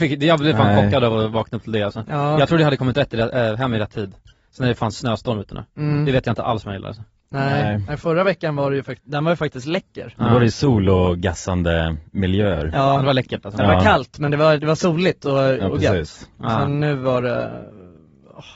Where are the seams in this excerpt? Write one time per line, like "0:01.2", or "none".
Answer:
none